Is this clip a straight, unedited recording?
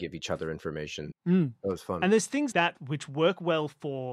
no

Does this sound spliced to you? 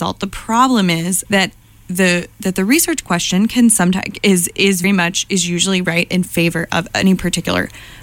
yes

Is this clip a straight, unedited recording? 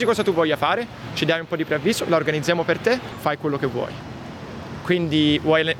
no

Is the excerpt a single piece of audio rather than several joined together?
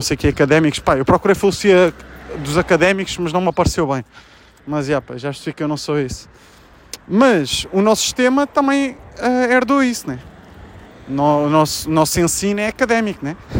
no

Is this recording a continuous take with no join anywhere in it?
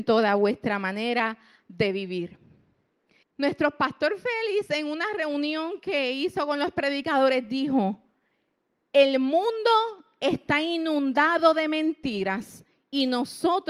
no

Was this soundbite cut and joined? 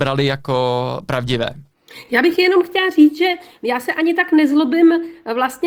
no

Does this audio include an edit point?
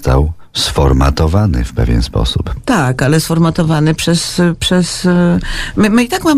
no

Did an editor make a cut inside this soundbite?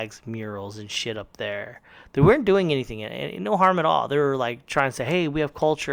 no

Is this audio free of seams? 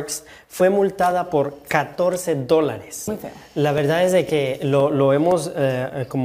no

